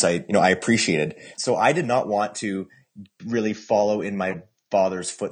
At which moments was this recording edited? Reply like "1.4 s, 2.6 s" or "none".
1.3 s